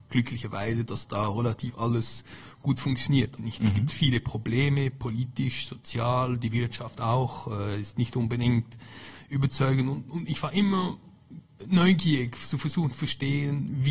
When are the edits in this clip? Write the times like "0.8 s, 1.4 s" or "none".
3.4 s, 11.6 s